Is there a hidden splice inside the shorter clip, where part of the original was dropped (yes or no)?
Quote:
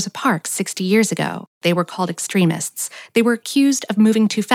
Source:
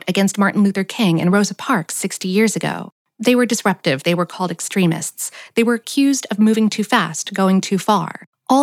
yes